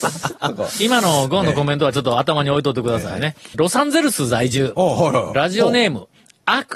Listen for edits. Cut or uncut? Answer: cut